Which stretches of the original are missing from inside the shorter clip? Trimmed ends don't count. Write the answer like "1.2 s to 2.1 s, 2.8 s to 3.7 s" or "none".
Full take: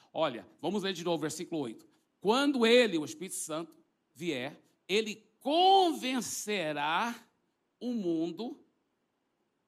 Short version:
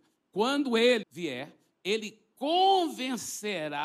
2.9 s to 4.1 s